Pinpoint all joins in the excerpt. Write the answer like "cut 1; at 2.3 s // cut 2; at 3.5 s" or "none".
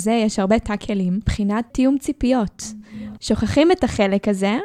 cut 1; at 1.7 s // cut 2; at 3.2 s